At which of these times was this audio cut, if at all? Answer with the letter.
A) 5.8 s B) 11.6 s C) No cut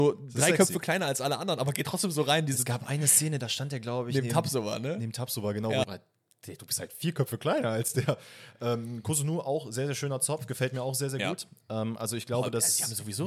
A